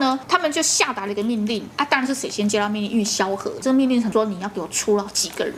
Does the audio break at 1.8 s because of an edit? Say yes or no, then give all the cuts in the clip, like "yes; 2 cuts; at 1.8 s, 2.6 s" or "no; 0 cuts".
no; 1 cut; at 3.6 s